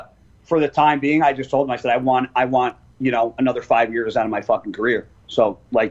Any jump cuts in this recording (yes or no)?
no